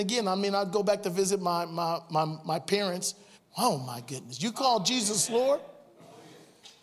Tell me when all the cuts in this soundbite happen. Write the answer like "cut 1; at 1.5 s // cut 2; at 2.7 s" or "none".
cut 1; at 3.3 s